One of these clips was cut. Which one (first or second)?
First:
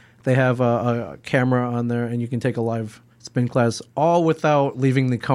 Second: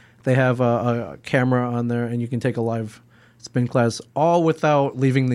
first